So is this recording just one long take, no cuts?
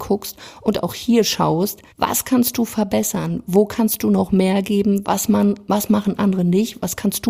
no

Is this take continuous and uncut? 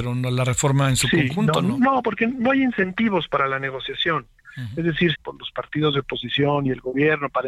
no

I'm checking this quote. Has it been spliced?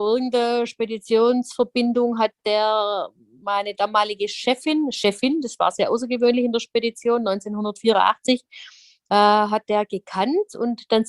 no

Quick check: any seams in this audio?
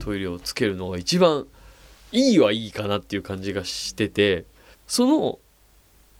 yes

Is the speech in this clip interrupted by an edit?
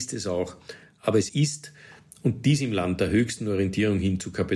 yes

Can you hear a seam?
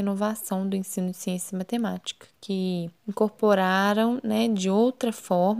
yes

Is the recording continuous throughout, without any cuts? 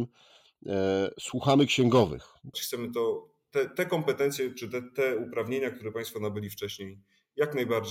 no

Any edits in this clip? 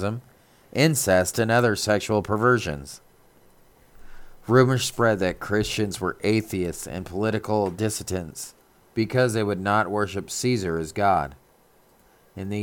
no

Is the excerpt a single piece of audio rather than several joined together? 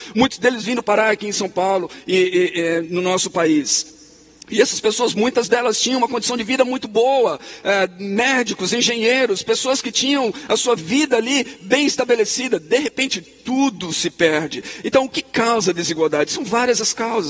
no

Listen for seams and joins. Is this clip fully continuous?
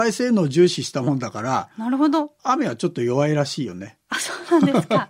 yes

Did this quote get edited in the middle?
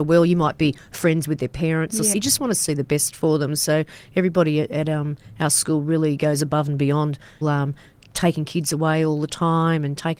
yes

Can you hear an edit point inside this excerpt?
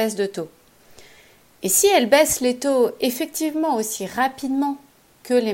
no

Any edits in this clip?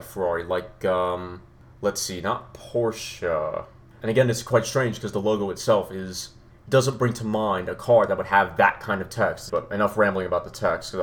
yes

